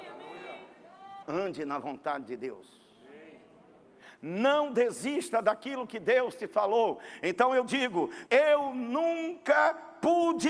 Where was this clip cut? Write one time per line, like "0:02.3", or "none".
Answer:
0:01.2
0:08.3